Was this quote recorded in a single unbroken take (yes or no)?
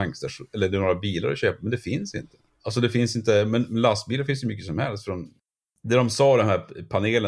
yes